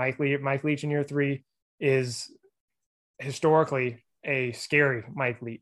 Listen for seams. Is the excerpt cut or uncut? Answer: uncut